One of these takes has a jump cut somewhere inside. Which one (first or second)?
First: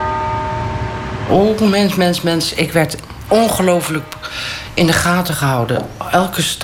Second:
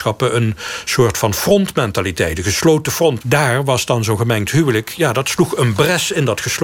second